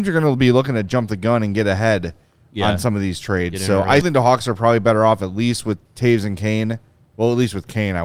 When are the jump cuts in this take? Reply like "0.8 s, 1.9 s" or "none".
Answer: 4.0 s, 5.9 s